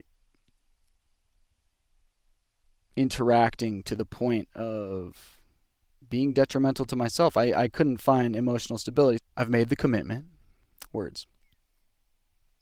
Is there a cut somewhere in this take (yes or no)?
yes